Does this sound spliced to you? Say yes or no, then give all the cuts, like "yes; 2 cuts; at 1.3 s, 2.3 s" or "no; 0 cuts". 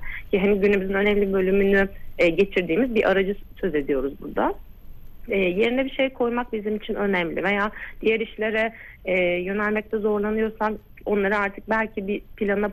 no; 0 cuts